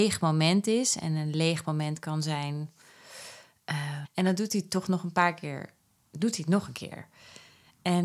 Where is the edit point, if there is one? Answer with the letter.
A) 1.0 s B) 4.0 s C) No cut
B